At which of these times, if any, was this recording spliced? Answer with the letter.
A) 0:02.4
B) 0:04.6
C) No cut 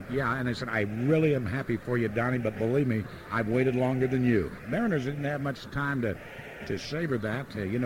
B